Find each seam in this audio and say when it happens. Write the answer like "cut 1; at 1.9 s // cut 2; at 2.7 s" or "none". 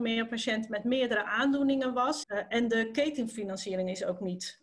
cut 1; at 2.2 s